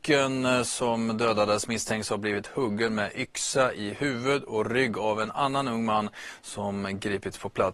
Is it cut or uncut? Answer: uncut